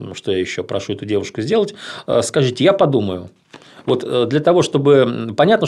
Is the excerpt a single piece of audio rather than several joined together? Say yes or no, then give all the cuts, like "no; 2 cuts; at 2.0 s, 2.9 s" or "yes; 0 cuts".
yes; 0 cuts